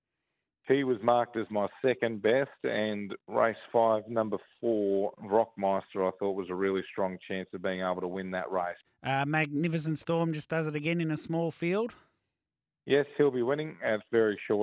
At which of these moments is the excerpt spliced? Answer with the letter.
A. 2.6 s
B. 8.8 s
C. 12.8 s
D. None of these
B